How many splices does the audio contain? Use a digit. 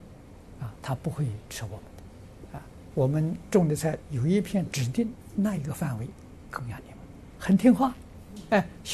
2